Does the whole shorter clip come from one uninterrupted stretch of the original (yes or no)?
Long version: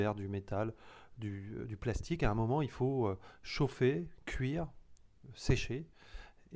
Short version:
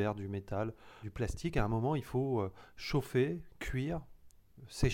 no